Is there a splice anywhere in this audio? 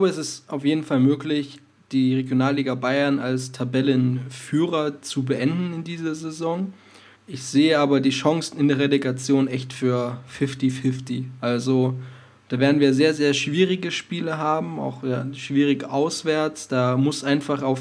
yes; 1 cut; at 7.1 s

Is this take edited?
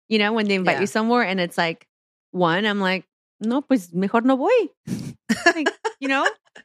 no; 0 cuts

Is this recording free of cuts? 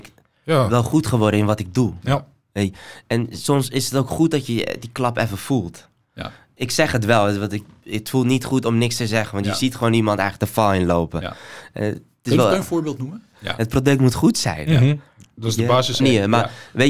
no; 2 cuts; at 13.3 s, 16.0 s

